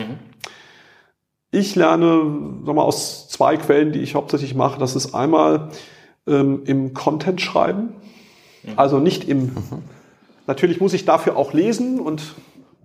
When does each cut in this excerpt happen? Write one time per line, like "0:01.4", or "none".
none